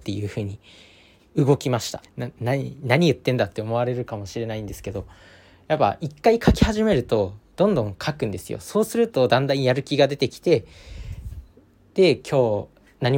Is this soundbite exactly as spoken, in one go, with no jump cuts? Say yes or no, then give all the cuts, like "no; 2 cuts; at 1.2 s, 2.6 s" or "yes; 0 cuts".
no; 1 cut; at 2.0 s